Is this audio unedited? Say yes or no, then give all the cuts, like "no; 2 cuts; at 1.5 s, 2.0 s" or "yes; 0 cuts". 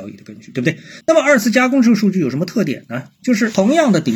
no; 1 cut; at 1.0 s